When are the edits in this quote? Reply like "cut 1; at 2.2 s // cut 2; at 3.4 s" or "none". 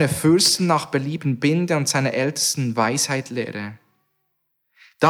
none